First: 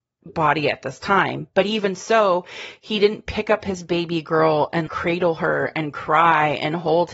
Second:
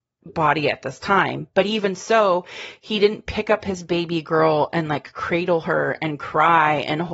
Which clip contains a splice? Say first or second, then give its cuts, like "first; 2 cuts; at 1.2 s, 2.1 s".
first; 1 cut; at 4.9 s